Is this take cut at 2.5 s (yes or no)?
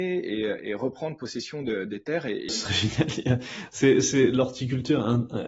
yes